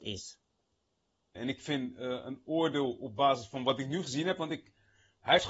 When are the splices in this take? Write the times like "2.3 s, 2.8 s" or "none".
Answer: 1.4 s